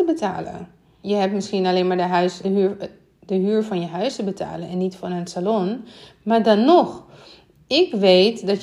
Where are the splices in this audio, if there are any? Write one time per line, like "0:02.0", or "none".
0:01.0
0:02.4

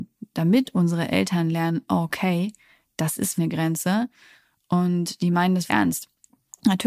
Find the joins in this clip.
0:03.4
0:05.7

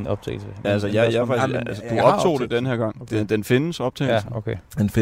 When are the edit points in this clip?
none

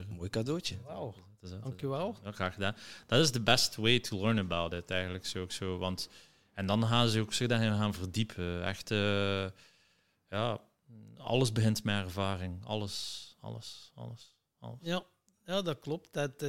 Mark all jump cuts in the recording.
none

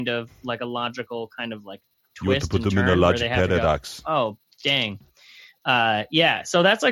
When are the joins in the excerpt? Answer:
none

